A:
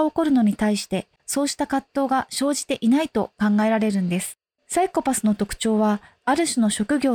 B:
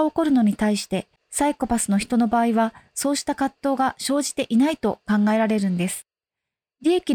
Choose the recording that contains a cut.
A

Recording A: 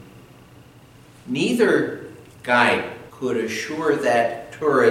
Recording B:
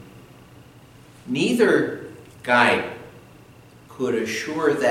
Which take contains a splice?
A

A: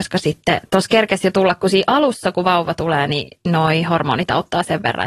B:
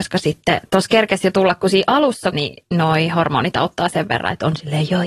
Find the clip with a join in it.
B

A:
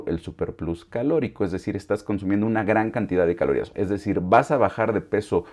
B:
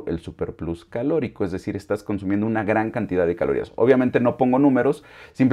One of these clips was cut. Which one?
A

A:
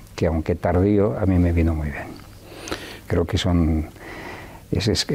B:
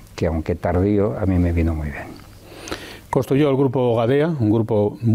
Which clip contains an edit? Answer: A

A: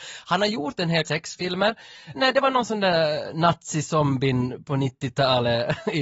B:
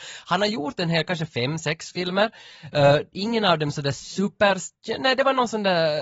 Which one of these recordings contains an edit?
A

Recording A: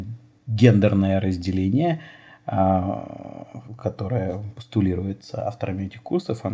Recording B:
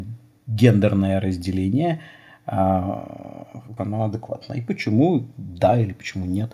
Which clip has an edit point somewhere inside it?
B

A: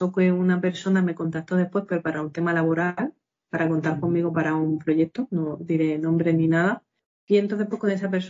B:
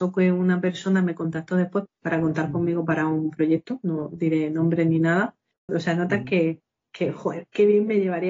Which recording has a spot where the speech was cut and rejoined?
B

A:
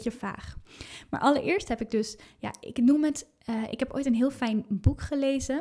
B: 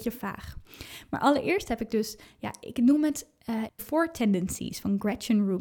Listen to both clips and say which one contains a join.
B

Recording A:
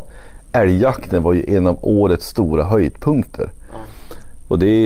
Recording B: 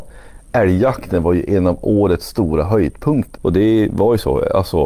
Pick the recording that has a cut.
B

